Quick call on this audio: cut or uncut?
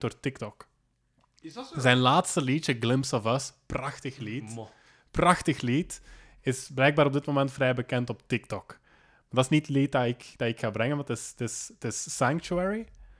uncut